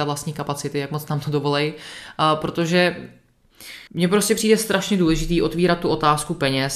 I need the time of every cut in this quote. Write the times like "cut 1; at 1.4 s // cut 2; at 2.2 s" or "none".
cut 1; at 3.9 s